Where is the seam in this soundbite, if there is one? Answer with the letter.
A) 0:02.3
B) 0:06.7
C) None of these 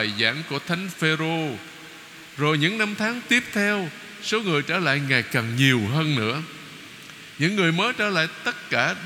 C